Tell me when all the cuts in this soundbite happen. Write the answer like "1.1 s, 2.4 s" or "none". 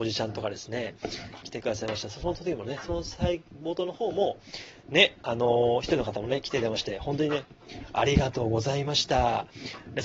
1.4 s